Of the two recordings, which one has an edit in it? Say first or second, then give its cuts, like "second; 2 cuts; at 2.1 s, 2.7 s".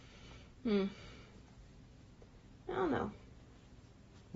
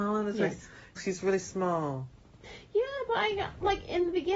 second; 1 cut; at 1.0 s